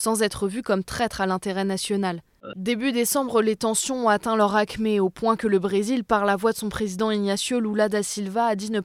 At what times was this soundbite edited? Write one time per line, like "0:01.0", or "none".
0:02.5